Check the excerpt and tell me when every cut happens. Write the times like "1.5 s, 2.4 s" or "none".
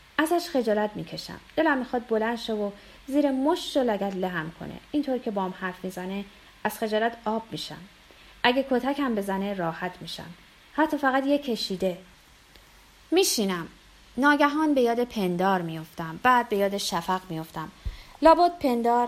none